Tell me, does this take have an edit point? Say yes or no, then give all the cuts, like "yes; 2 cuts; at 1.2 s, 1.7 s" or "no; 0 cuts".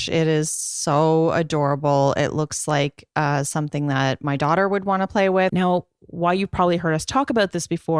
yes; 1 cut; at 5.5 s